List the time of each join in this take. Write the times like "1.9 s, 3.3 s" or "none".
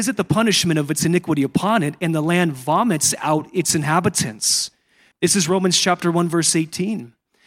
5.1 s

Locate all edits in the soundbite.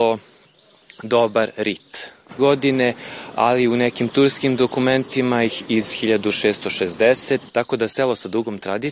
2.4 s, 7.5 s

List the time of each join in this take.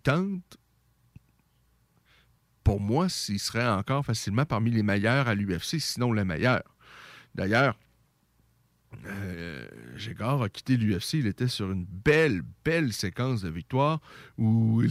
none

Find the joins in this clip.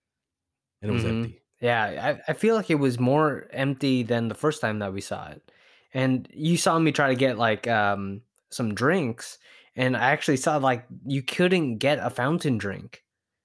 1.5 s

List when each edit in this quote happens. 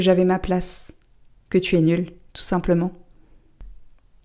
1.4 s

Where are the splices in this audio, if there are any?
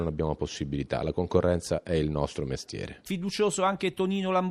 none

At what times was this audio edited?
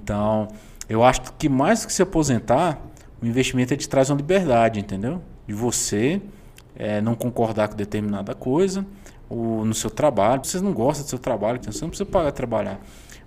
10.4 s, 11.6 s

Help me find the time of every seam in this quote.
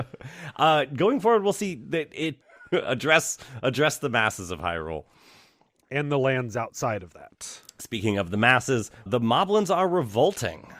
2.4 s, 9.1 s

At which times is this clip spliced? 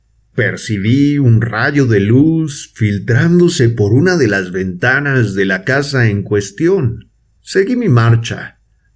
7.4 s

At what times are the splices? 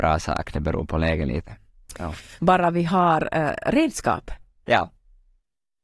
2.4 s

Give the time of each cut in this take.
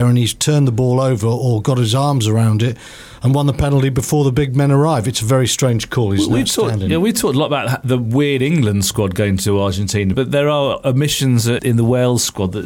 10.1 s, 11.6 s

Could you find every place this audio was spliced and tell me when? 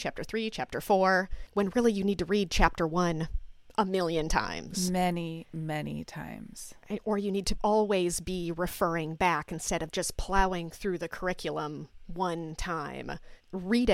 none

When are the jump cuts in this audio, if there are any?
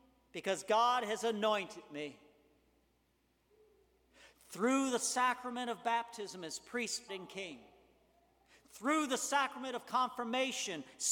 7.1 s

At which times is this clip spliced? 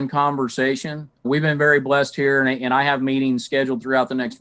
1.2 s

